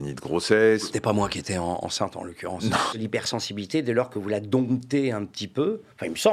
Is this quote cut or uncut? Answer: cut